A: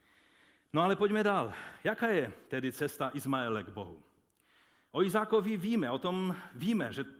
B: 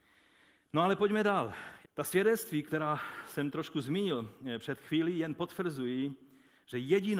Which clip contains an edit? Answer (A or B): B